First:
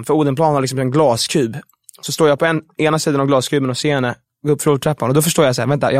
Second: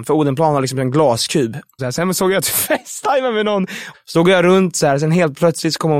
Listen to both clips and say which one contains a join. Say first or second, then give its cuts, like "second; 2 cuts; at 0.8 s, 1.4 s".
second; 2 cuts; at 1.8 s, 3.9 s